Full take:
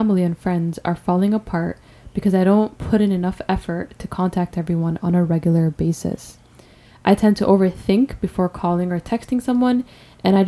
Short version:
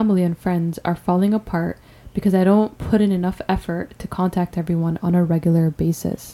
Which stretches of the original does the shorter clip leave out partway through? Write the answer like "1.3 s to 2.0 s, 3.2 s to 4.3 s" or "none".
none